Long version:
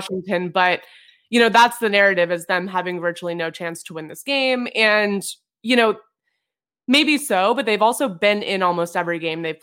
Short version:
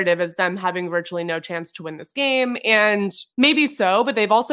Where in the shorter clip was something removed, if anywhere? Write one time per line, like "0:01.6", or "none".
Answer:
0:03.3